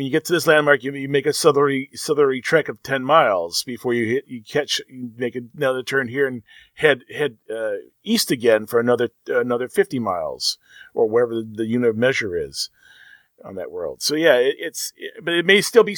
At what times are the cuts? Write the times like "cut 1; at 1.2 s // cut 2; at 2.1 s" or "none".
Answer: none